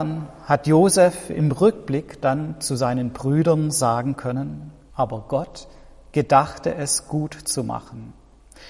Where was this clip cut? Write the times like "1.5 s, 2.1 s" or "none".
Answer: 4.9 s